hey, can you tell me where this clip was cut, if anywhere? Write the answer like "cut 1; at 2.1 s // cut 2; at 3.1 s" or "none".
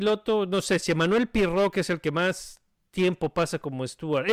none